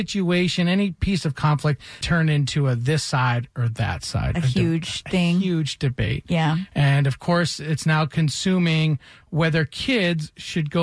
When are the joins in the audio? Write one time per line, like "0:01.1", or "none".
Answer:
0:02.0